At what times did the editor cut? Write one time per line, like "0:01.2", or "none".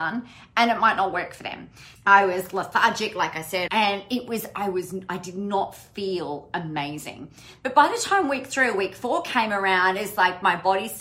0:02.0
0:03.7